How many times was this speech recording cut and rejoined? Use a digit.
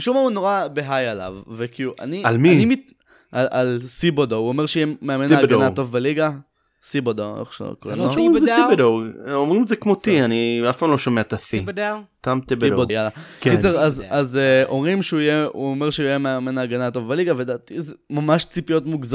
1